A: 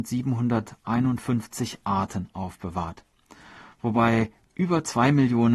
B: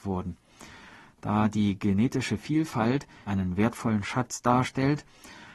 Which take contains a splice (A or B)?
B